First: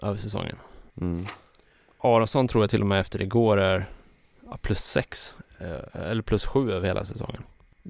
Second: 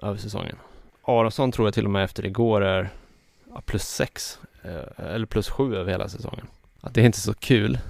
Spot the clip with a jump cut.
second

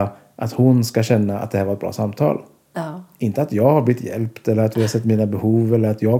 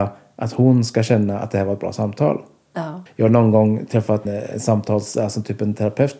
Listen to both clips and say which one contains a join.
second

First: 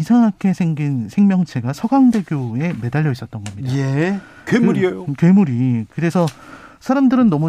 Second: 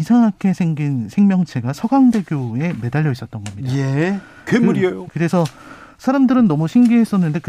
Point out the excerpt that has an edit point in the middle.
second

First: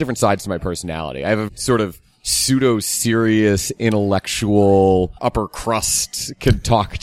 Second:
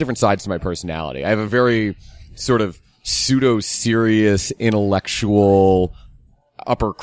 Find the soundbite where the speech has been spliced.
first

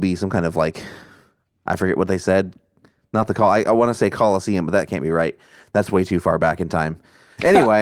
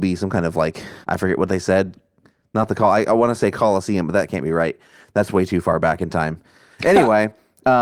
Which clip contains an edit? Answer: second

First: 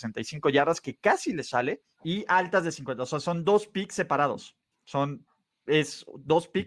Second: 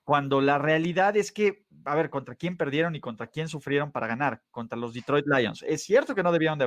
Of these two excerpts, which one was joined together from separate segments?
first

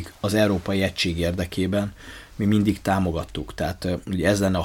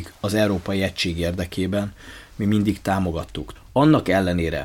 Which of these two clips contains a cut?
second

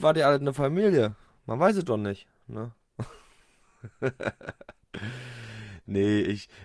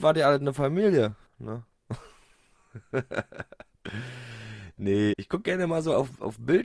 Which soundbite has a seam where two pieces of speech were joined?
second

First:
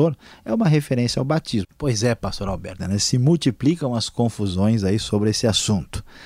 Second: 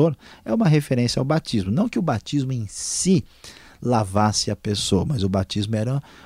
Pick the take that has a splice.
first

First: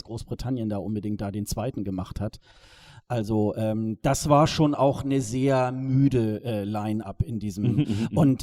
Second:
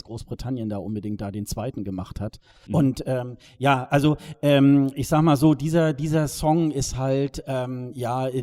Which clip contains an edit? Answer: second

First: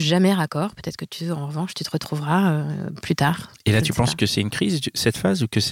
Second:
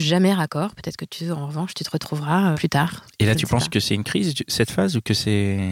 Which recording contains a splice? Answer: second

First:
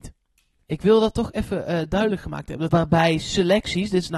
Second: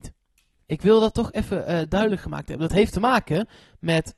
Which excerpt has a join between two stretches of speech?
first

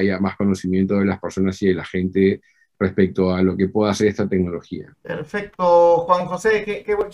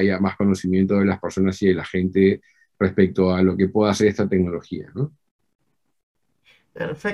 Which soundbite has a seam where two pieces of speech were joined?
first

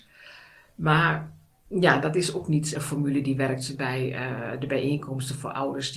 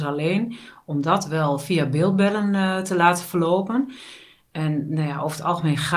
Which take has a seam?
first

